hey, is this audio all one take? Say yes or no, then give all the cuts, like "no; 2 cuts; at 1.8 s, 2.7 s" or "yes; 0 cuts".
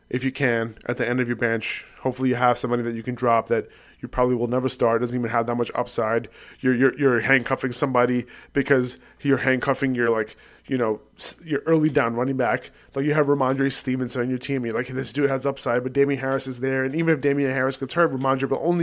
yes; 0 cuts